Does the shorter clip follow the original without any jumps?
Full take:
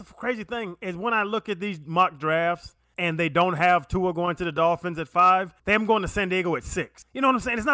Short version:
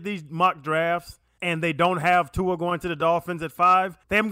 yes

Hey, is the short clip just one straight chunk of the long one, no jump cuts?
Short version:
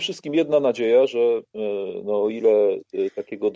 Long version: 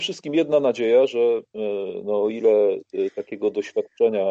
yes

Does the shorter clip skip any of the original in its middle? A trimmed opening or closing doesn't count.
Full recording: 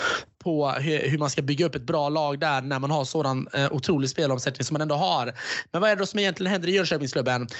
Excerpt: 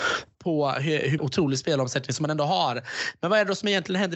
yes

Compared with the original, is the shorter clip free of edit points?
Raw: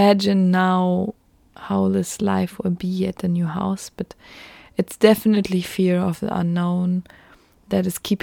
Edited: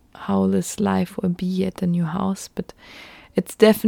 yes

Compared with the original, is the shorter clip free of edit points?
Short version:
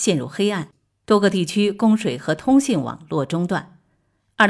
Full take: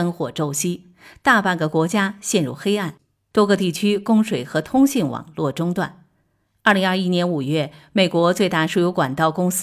yes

